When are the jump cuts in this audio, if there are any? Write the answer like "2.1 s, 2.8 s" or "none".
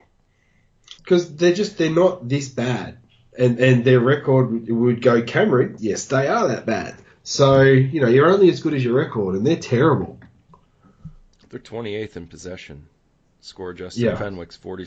1.0 s, 5.8 s